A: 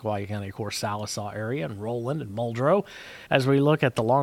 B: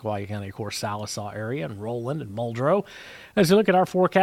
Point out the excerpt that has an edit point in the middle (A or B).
A